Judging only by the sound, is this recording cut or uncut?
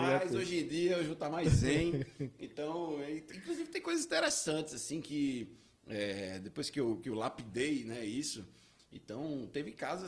uncut